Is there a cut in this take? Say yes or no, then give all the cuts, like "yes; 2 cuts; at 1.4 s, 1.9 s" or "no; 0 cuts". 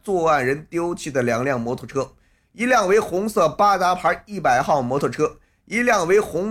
no; 0 cuts